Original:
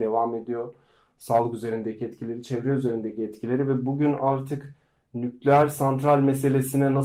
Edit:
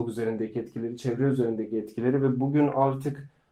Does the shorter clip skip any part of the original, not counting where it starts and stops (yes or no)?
no